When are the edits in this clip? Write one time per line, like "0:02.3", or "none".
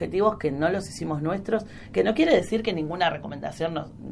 none